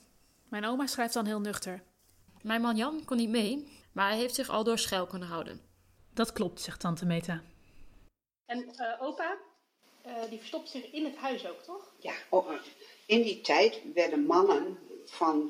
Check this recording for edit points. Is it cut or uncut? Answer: cut